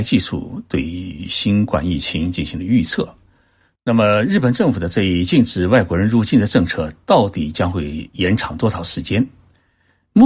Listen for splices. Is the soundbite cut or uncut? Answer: cut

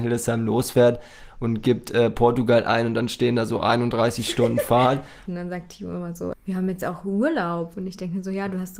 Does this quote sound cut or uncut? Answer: cut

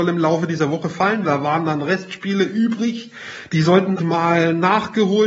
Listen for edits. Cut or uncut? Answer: cut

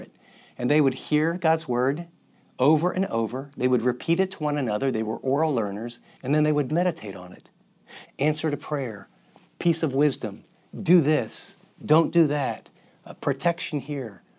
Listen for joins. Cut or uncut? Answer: cut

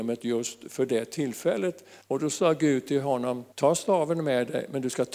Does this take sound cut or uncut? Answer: cut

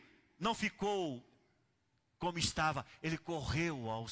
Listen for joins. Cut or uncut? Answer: uncut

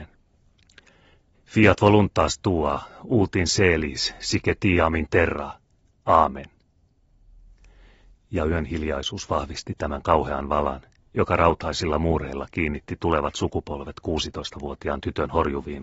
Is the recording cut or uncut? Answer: uncut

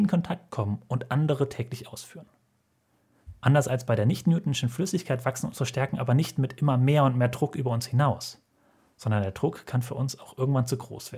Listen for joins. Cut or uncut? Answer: uncut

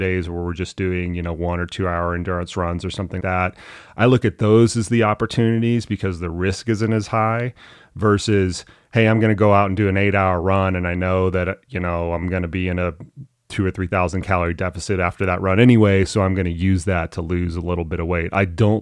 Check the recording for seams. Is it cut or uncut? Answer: cut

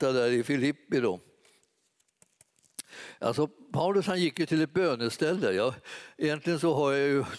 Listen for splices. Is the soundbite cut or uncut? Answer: uncut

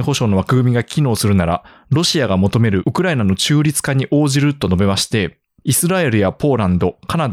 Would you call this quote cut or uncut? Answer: cut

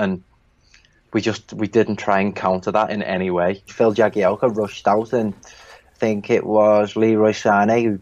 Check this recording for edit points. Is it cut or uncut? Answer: cut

